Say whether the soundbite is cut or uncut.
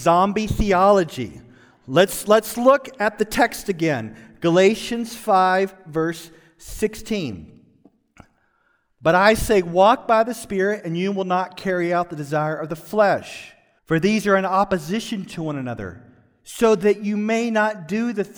cut